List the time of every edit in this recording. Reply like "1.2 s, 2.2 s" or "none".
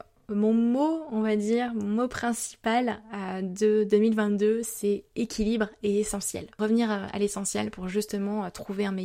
none